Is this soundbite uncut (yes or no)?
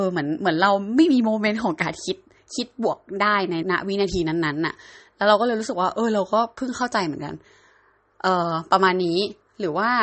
no